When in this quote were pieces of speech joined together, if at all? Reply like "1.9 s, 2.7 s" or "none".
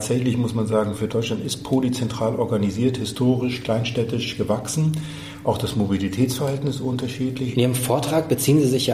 1.1 s, 5.4 s, 7.5 s